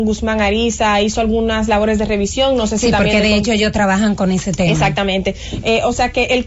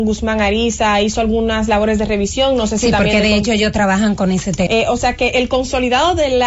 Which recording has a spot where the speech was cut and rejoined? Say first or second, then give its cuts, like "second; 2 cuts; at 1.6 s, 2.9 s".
second; 1 cut; at 4.7 s